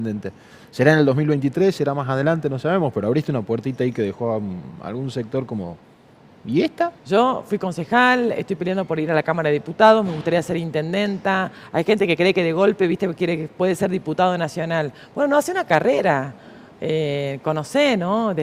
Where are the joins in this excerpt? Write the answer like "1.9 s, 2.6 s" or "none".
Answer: 7.0 s